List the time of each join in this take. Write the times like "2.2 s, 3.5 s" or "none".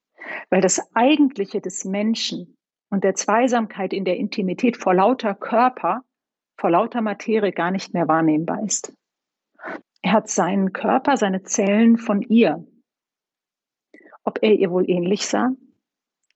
9.8 s